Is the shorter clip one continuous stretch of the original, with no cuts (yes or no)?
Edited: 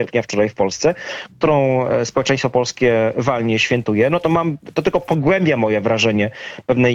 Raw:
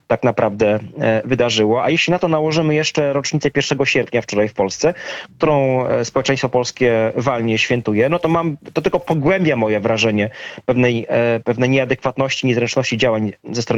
yes